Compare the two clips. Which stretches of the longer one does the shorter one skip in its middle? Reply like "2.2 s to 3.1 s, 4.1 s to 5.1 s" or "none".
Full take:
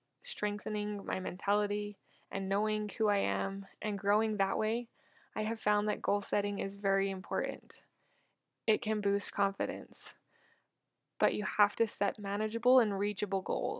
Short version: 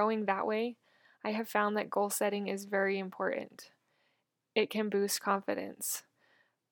none

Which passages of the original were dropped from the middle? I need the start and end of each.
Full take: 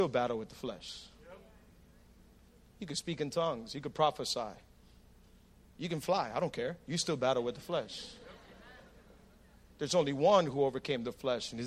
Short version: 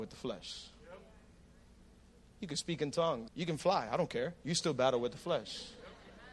3.7 s to 5.7 s

